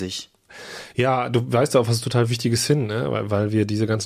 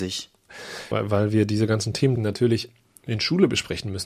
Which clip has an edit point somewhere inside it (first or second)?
second